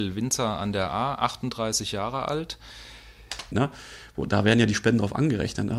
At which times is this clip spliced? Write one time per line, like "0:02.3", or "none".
0:03.5